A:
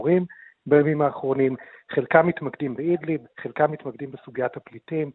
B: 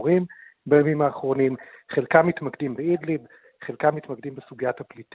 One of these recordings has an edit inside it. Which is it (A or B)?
A